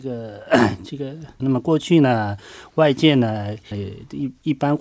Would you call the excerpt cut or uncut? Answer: cut